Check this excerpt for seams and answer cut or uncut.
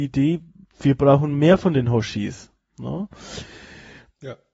uncut